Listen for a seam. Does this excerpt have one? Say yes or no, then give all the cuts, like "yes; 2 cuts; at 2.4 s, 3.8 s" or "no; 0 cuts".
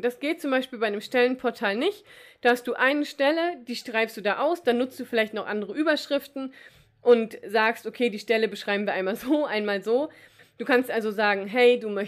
yes; 1 cut; at 10.4 s